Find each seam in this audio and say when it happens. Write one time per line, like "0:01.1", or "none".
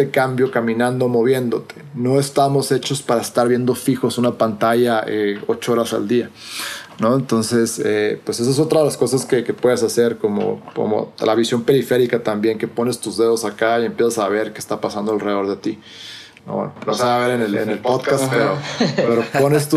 0:16.4